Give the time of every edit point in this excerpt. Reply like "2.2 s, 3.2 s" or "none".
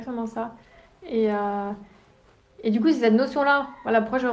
none